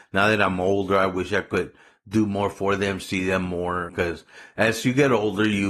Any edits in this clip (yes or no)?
yes